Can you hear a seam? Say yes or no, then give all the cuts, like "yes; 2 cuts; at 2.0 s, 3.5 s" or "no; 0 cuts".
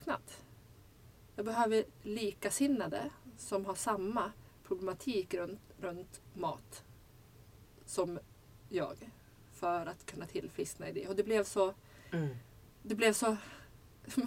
no; 0 cuts